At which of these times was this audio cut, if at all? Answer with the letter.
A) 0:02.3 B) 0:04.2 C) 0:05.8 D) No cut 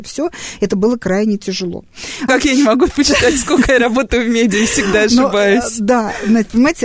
A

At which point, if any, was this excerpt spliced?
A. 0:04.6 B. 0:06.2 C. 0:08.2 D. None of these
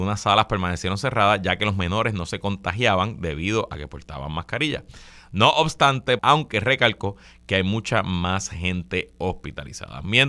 B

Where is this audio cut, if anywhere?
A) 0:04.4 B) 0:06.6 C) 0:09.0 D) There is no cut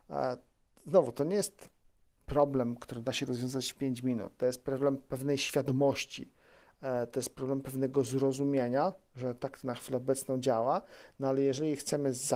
D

